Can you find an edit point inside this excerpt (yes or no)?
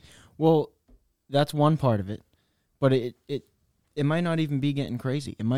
no